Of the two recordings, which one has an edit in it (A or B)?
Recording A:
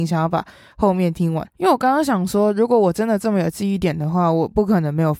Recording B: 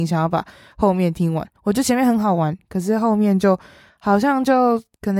A